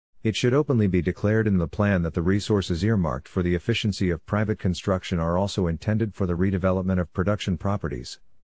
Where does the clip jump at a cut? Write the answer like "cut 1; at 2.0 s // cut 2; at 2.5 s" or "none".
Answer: none